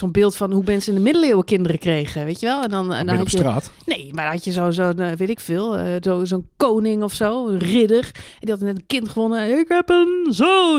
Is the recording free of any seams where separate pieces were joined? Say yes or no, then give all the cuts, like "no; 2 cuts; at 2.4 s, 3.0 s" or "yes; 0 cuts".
yes; 0 cuts